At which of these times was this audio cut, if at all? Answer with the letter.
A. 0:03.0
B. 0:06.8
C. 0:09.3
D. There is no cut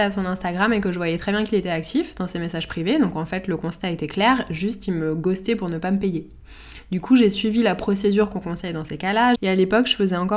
C